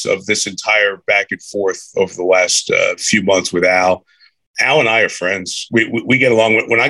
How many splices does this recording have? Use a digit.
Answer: 0